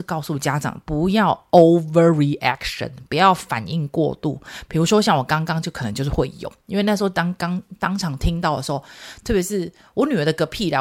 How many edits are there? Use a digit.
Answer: 0